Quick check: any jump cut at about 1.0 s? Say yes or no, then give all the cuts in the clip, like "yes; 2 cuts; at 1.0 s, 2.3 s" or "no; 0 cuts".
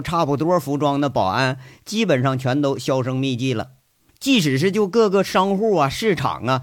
no; 1 cut; at 4.1 s